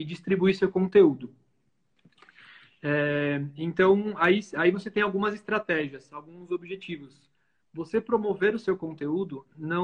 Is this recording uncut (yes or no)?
yes